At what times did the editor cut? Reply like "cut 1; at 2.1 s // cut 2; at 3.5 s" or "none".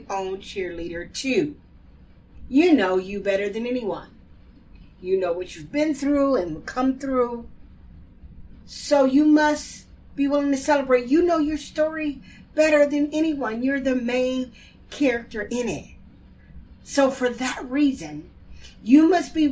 none